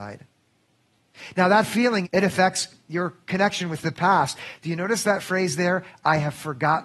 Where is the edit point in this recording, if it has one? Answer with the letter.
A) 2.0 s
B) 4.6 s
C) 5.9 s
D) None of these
A